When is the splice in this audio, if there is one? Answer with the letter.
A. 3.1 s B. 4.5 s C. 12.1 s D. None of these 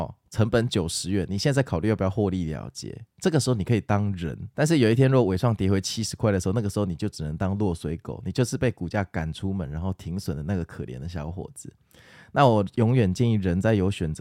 B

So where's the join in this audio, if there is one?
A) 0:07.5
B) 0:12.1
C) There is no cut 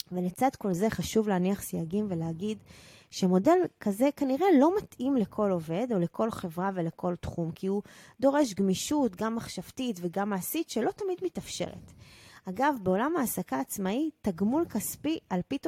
C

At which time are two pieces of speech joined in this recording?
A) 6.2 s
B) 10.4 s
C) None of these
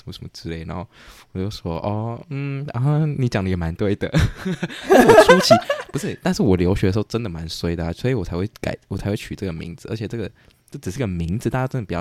C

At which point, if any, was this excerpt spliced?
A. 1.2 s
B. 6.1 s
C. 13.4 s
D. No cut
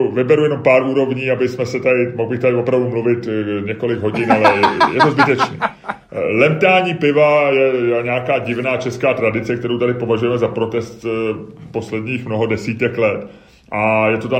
D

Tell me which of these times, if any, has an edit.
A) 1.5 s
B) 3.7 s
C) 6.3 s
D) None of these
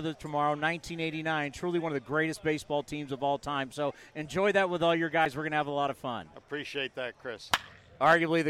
D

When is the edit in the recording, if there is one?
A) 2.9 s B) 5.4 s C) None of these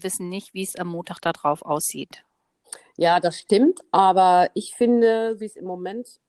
B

